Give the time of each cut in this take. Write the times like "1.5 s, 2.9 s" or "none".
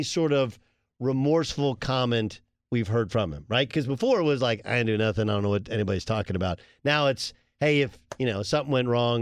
none